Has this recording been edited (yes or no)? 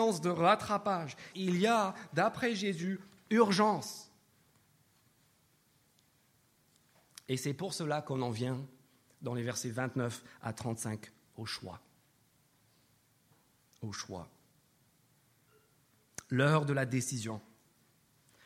yes